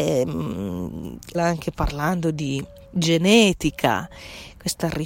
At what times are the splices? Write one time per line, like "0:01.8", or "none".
0:01.3